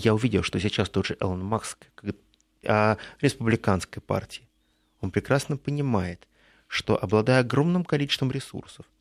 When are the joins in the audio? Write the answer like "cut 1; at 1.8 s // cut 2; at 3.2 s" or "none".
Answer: cut 1; at 2.6 s